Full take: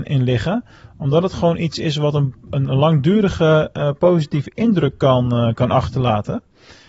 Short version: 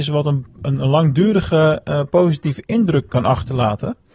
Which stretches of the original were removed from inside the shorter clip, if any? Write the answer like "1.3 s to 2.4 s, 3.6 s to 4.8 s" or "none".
5.0 s to 5.5 s